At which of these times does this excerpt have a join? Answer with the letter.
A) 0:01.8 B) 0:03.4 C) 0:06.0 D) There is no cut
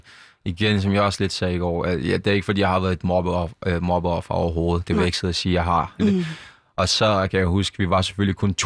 C